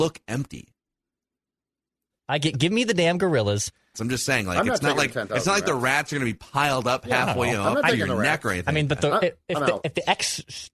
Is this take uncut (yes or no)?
no